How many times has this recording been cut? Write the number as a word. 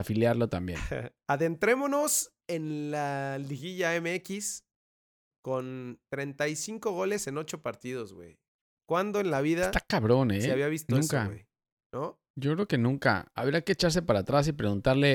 zero